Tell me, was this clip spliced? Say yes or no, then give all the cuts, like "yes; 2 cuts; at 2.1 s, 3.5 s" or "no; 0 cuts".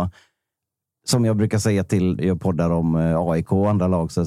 yes; 1 cut; at 2.2 s